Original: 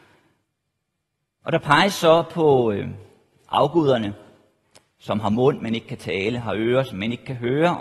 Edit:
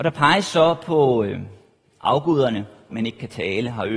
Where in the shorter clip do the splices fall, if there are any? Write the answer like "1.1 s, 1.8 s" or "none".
2.9 s

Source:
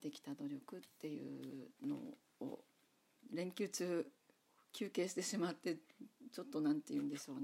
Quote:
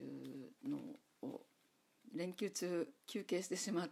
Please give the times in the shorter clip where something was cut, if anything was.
3.0 s

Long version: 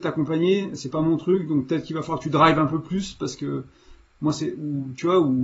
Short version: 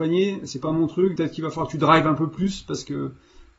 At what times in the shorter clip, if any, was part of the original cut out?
1.2 s

